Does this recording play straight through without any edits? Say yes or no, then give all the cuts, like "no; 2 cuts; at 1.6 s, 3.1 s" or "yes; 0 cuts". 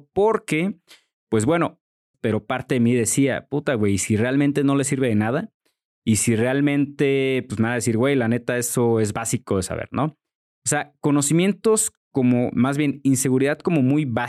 no; 1 cut; at 2.1 s